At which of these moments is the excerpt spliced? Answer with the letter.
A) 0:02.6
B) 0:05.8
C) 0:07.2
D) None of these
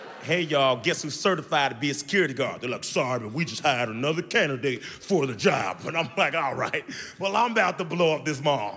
D